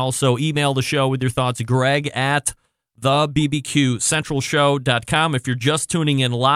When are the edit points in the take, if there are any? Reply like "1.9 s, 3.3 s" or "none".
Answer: none

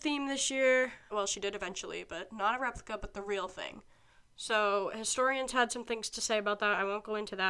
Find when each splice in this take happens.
1.1 s

